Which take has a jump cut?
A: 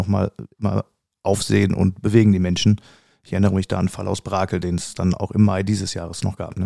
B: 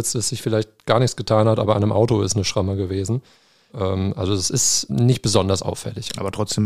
B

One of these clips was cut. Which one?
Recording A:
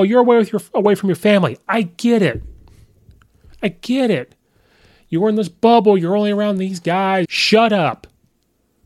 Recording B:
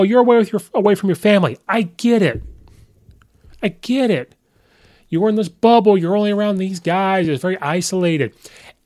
A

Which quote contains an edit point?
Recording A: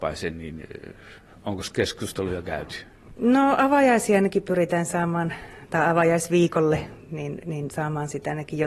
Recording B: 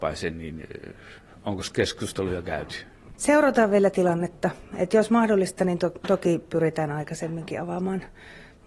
B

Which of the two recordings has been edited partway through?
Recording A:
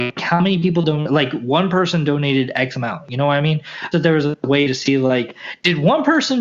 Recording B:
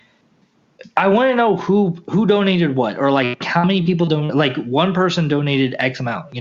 A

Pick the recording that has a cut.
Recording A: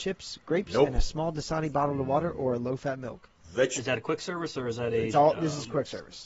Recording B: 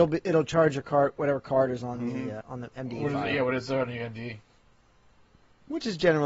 B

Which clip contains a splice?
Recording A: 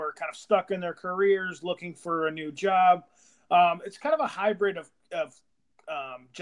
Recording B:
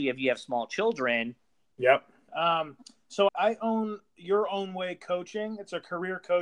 B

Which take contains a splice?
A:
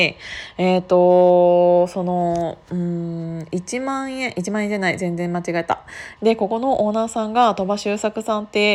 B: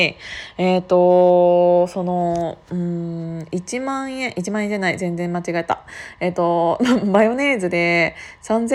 A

